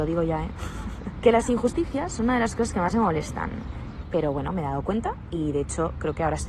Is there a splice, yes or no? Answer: yes